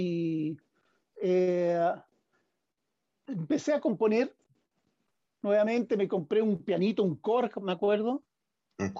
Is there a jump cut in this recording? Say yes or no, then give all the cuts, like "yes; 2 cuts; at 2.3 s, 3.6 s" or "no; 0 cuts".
no; 0 cuts